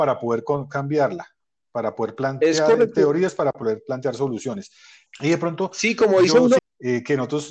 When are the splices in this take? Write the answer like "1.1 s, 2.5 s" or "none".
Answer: 5.1 s, 6.6 s